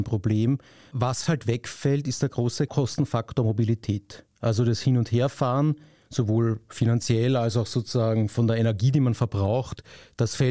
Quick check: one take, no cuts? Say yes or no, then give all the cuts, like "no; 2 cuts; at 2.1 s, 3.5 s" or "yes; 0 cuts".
yes; 0 cuts